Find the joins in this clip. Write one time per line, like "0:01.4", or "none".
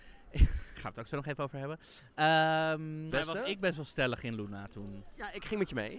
0:03.1